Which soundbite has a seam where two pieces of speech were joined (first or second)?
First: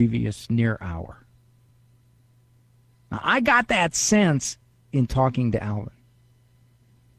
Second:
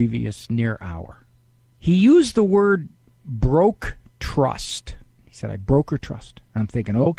second